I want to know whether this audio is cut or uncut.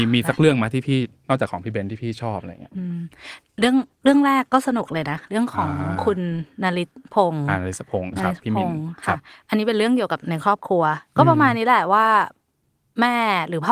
uncut